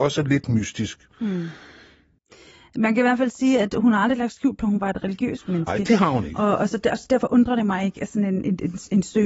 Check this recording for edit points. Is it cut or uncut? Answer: uncut